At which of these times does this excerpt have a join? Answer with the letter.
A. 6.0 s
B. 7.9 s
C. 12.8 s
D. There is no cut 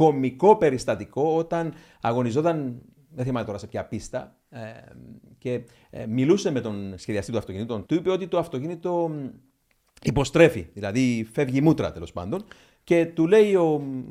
B